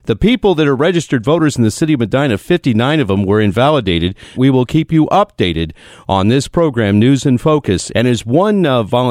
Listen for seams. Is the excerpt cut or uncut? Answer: cut